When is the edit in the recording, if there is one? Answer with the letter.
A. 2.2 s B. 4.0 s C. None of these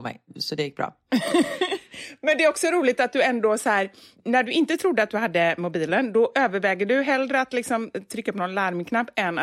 C